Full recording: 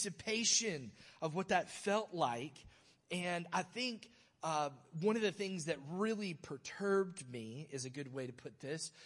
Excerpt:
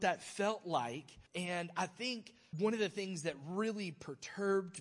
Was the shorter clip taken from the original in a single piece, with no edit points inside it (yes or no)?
no